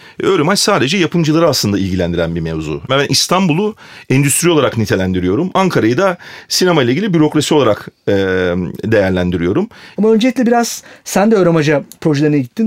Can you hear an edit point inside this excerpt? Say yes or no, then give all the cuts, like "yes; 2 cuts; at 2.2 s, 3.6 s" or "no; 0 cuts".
yes; 2 cuts; at 2.9 s, 10.0 s